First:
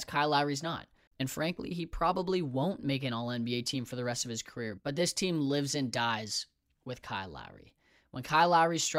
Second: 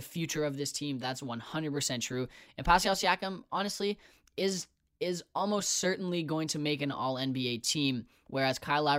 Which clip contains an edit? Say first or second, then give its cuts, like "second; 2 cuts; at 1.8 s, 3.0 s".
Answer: first; 2 cuts; at 1.1 s, 4.8 s